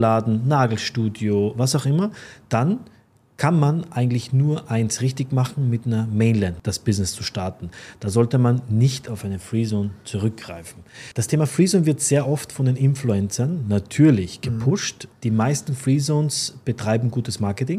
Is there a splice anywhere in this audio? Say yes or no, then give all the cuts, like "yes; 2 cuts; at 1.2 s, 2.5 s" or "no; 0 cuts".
no; 0 cuts